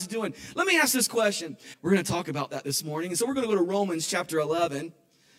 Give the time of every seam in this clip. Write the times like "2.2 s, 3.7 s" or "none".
1.7 s